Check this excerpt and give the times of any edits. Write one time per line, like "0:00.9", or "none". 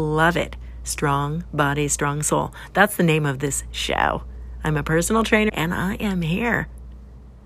0:05.5